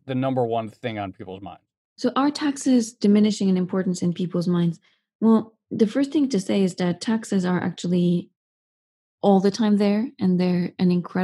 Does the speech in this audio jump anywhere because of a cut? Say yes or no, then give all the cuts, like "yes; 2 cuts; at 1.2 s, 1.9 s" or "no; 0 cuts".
no; 0 cuts